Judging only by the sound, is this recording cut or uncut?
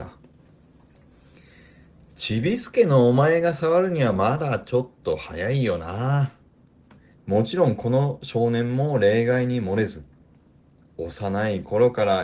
cut